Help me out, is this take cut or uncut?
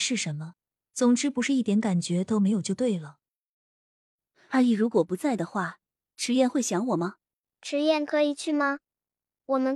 cut